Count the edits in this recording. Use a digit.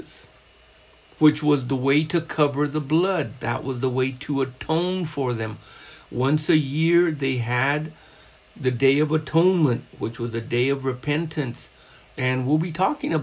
0